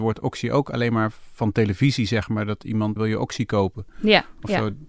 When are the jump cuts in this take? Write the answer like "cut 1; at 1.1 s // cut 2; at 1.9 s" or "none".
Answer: cut 1; at 3.0 s